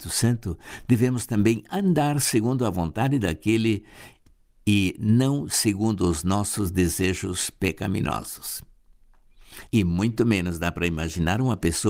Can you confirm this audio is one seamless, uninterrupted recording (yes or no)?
no